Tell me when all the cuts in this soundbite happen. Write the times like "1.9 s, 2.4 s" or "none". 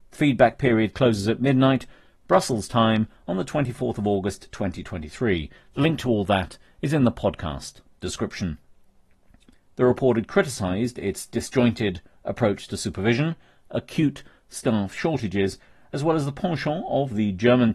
9.5 s